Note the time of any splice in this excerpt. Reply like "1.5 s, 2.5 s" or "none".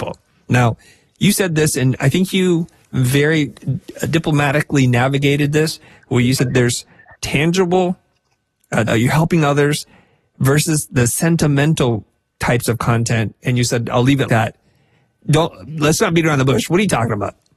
8.9 s, 14.3 s